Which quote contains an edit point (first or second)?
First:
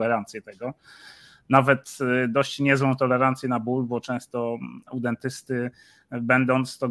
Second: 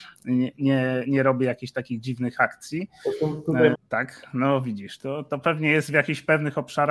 second